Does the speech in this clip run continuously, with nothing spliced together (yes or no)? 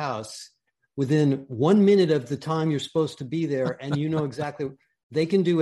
yes